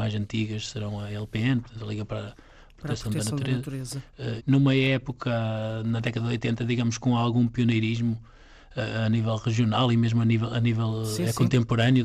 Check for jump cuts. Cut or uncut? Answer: cut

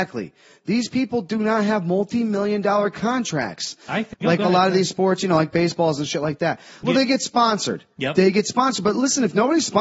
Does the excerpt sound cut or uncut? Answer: cut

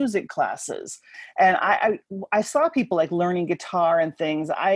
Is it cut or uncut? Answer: uncut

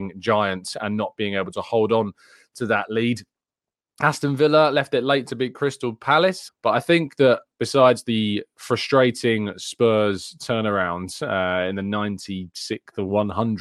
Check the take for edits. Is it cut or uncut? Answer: cut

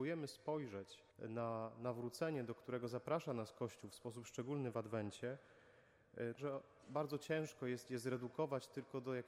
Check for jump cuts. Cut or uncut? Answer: cut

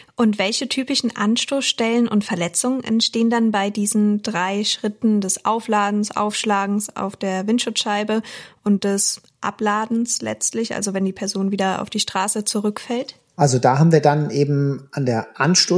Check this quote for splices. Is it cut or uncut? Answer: uncut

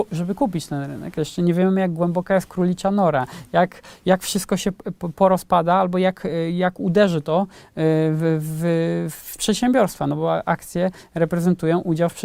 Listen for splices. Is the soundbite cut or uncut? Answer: cut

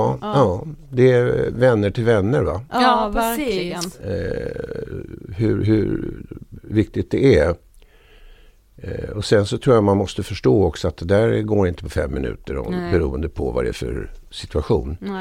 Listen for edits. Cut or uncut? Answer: uncut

